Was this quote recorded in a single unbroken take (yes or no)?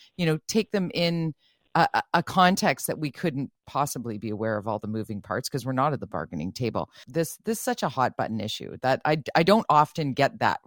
no